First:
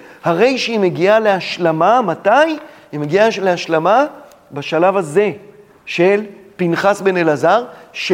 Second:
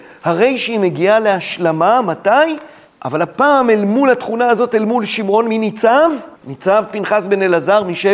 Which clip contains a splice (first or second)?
second